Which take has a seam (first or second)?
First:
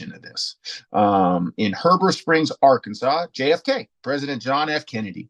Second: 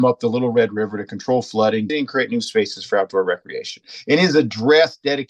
second